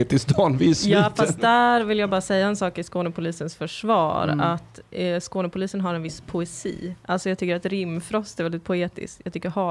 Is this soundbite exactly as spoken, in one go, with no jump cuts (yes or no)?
yes